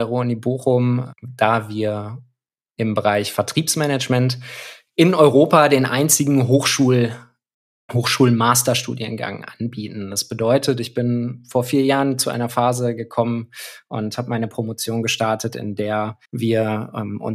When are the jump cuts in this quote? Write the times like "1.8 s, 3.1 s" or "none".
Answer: 16.2 s